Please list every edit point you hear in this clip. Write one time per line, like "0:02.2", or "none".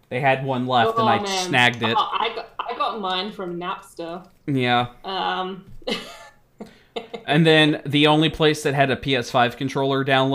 none

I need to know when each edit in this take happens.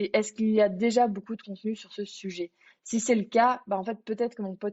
none

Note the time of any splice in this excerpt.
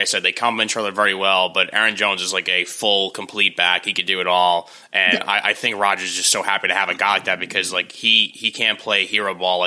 none

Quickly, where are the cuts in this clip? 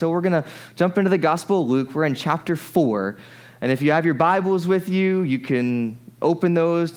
none

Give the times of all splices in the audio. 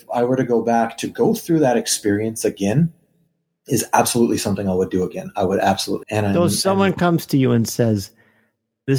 0:06.0

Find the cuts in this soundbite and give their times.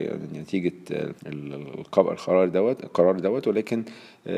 0:01.2

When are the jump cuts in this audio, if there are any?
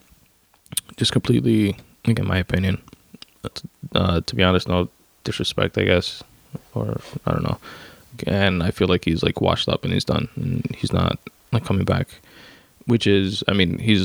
0:02.2
0:03.5
0:08.2

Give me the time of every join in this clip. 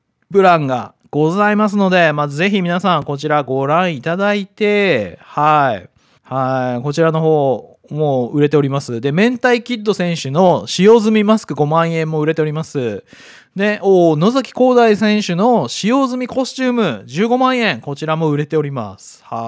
0:06.2

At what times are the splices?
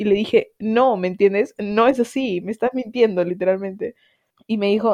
none

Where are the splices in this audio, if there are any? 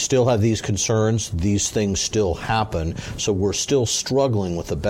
none

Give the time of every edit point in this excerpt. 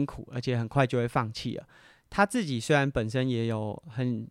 none

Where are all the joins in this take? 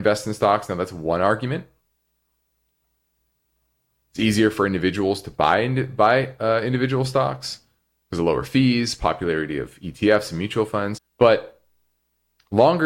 0:11.0

